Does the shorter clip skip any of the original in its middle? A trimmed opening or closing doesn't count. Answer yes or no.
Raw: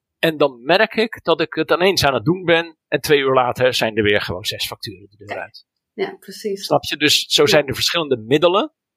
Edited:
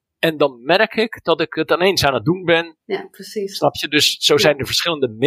yes